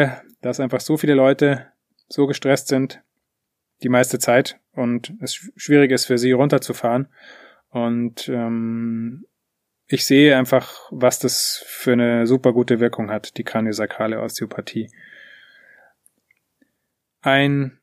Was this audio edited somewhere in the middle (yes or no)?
no